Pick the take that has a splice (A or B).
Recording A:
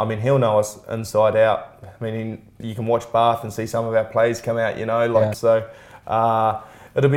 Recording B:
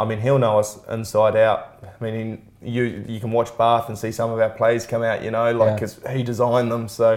A